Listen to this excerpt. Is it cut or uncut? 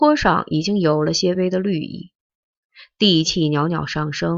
cut